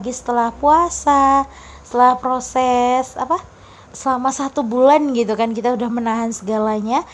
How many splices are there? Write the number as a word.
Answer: one